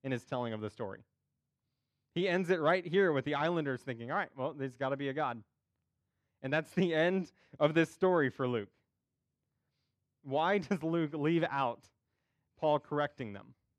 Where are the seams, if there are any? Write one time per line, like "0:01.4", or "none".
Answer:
none